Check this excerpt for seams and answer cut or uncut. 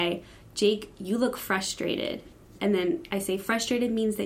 cut